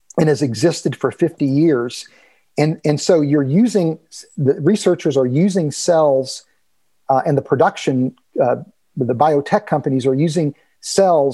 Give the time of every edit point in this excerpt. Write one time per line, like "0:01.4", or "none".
none